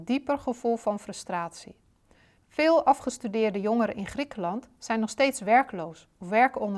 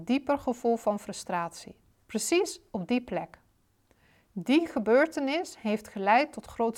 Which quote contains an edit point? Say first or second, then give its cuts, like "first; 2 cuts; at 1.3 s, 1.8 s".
second; 1 cut; at 1.9 s